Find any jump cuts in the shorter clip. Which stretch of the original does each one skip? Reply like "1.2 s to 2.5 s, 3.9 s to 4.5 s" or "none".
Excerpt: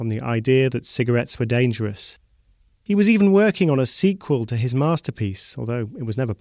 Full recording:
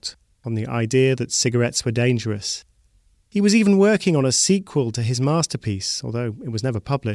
none